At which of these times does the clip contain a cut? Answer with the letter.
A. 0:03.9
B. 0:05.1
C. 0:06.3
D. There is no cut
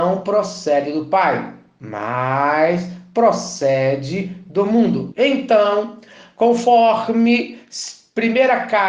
B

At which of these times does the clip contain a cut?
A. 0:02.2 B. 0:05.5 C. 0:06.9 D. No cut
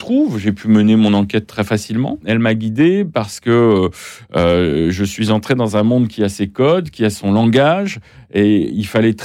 A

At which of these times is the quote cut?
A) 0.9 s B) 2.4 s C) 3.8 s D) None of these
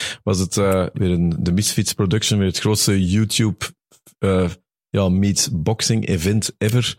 A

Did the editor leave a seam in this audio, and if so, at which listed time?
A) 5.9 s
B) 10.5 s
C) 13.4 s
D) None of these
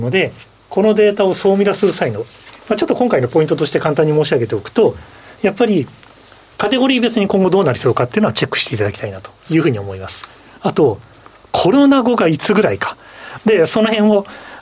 C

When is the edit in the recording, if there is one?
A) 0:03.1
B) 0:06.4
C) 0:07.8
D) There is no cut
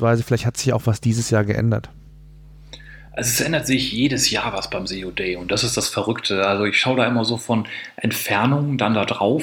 D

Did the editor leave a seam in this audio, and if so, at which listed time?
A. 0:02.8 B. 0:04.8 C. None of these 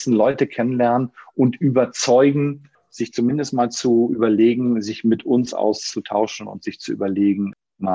C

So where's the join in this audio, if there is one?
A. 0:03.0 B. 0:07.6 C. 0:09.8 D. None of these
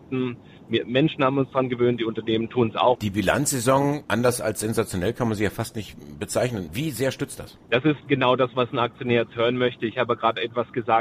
A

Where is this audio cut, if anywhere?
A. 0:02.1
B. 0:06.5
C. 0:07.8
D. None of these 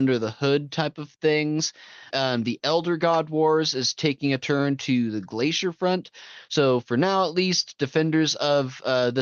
A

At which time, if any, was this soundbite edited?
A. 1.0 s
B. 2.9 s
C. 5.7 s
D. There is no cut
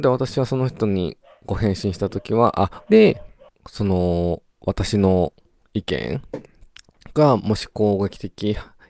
B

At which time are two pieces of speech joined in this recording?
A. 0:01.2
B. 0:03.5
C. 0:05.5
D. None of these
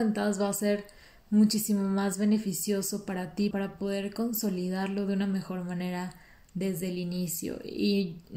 B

